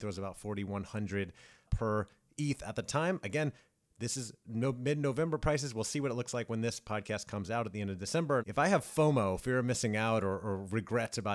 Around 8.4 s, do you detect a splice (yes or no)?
yes